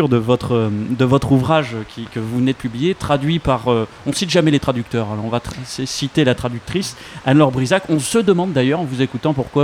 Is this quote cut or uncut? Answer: uncut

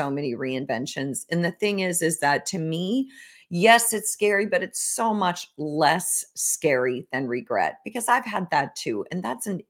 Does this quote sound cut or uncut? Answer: uncut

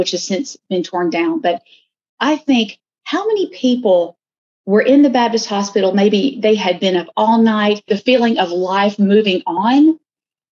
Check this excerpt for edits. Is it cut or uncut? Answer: cut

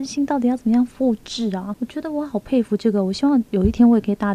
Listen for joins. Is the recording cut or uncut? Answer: uncut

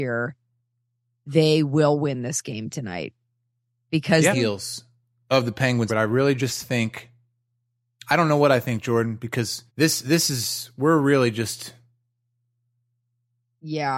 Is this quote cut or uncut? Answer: cut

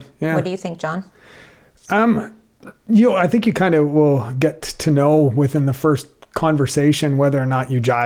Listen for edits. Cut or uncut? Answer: uncut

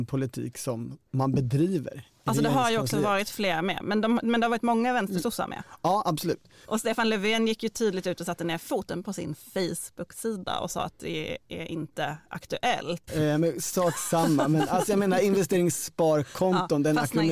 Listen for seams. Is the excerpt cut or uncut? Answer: cut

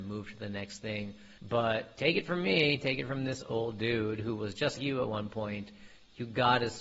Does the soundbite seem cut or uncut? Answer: cut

